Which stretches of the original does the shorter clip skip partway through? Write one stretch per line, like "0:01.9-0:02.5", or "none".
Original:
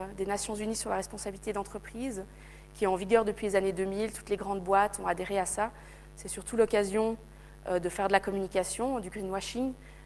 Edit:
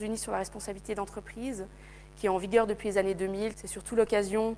0:04.1-0:06.1